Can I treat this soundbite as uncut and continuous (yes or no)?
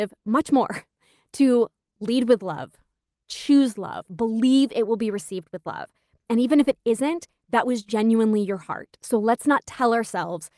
yes